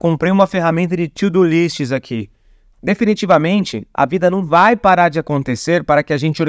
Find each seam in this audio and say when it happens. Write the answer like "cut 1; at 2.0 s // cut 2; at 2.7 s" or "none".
cut 1; at 2.7 s